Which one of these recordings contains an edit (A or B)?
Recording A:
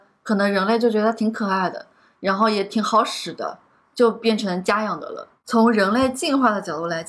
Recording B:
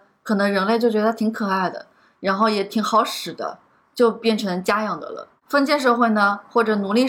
A